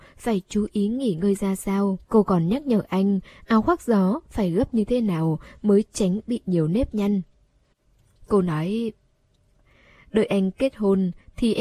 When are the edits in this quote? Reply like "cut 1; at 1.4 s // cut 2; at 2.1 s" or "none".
cut 1; at 2.0 s // cut 2; at 8.2 s